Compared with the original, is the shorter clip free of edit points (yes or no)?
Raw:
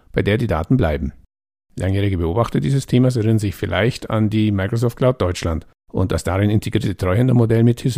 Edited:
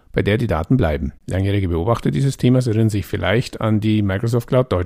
no